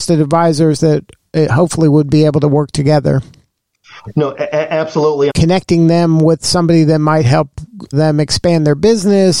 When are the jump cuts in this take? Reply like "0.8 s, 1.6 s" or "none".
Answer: 5.3 s, 7.9 s